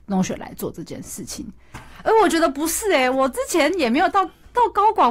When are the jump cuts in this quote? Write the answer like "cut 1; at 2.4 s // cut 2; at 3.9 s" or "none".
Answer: cut 1; at 1.7 s

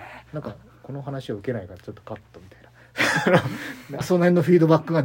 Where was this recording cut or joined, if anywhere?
cut 1; at 4.0 s

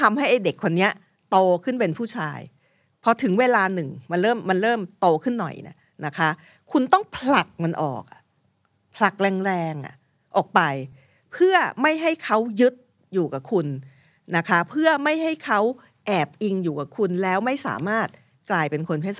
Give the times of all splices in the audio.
none

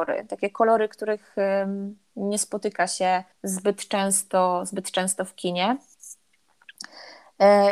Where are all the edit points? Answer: cut 1; at 3.3 s

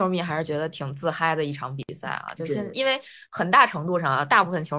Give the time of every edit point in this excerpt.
cut 1; at 2.7 s

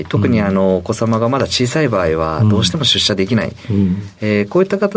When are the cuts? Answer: none

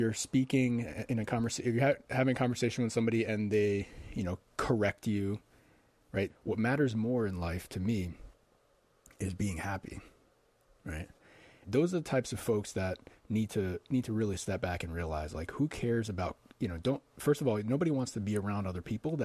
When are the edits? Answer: cut 1; at 6.3 s // cut 2; at 11.6 s // cut 3; at 13.2 s

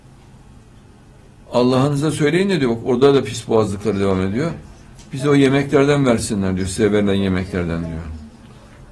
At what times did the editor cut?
none

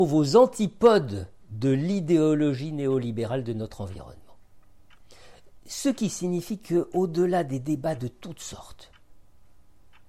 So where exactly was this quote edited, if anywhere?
none

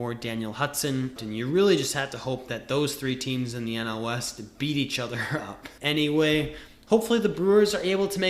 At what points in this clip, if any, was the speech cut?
cut 1; at 1.2 s // cut 2; at 5.8 s

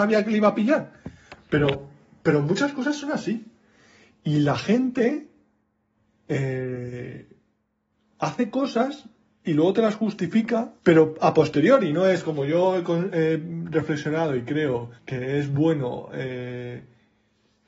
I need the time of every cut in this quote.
cut 1; at 10.8 s // cut 2; at 15.0 s

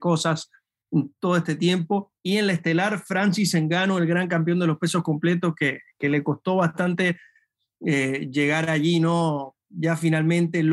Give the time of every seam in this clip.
cut 1; at 2.2 s

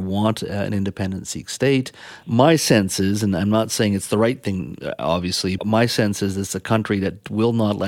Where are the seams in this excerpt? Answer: cut 1; at 2.2 s // cut 2; at 5.6 s

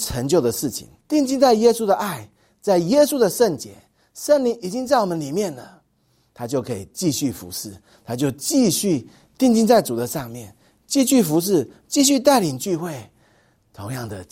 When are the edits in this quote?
cut 1; at 1.0 s

